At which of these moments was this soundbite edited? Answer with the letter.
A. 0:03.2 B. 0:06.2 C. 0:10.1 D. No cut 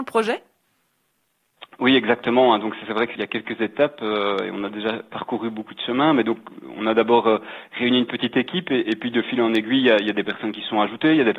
A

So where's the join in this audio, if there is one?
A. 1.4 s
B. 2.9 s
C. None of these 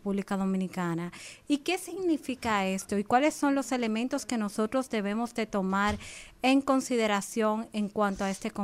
A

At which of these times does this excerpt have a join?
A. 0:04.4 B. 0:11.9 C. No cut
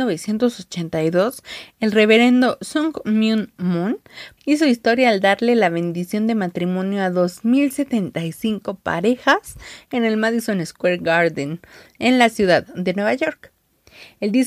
A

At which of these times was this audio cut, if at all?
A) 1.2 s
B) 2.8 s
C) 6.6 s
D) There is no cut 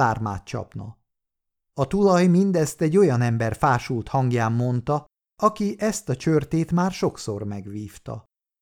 D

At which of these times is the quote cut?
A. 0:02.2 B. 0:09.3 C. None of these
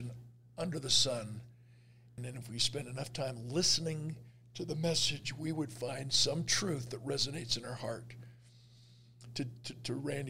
A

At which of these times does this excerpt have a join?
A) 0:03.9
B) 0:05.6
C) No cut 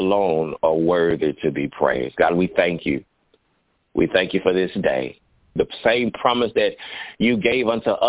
B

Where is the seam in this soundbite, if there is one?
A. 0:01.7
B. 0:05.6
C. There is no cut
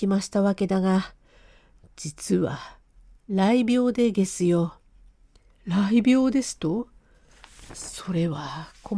B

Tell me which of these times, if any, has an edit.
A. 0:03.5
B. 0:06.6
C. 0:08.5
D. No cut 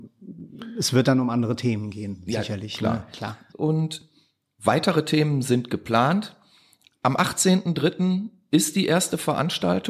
A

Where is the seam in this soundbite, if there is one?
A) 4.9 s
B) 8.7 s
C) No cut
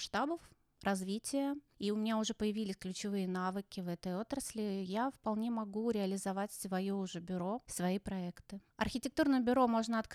B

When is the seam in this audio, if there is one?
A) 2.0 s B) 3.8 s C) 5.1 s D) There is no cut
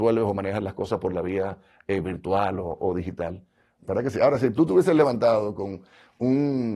B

